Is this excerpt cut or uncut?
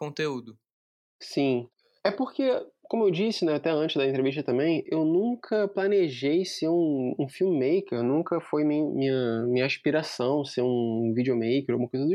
uncut